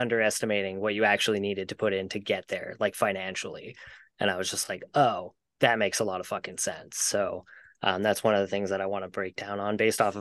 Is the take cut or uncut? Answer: uncut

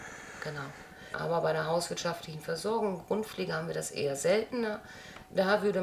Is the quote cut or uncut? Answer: cut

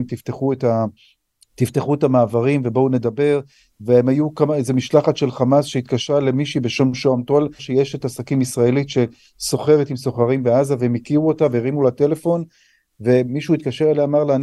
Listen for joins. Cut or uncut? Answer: cut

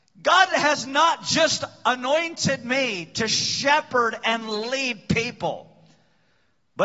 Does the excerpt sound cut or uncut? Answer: uncut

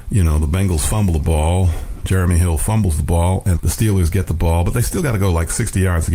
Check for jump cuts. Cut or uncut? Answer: cut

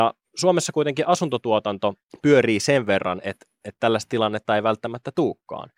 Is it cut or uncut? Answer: uncut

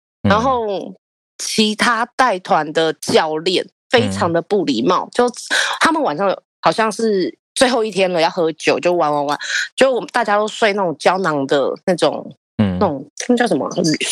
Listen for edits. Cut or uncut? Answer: uncut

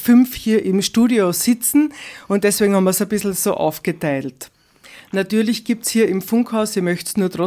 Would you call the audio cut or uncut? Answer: uncut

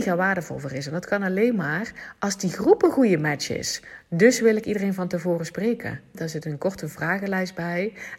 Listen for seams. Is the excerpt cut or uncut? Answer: cut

